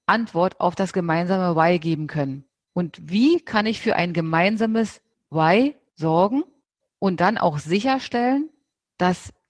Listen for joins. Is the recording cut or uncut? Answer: cut